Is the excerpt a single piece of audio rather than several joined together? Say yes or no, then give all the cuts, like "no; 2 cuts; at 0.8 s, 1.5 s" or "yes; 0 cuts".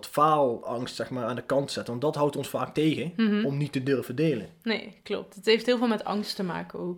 yes; 0 cuts